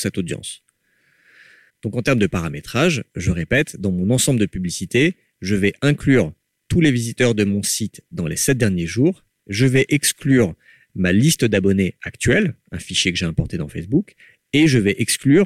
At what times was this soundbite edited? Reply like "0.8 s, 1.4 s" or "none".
none